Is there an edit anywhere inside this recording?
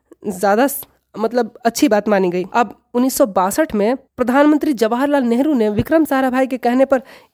yes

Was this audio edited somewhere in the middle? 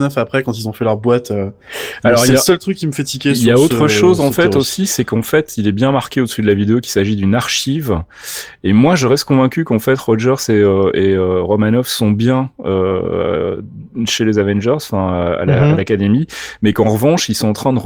no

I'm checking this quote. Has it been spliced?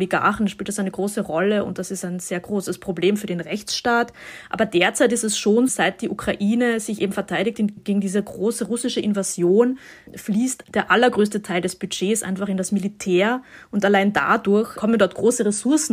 yes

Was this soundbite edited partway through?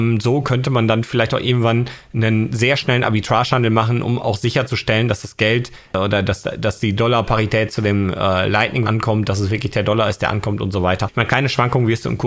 yes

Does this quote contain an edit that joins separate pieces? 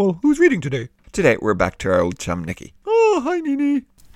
no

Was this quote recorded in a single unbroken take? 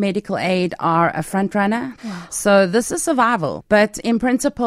no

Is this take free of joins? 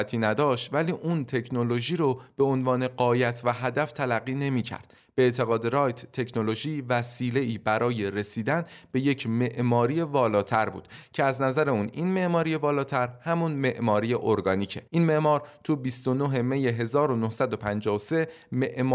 no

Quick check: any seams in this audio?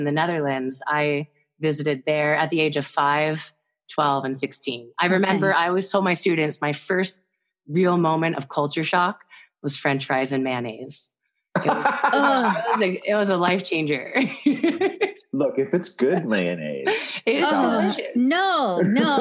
no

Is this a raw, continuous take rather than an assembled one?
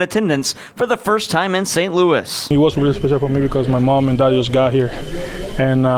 yes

